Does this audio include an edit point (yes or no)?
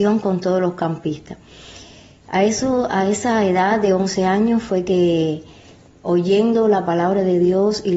no